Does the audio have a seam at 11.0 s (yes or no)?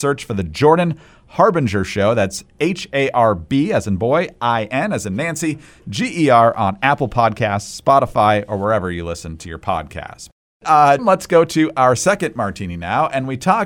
yes